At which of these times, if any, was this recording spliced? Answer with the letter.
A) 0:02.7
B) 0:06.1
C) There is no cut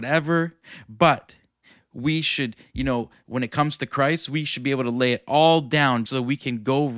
B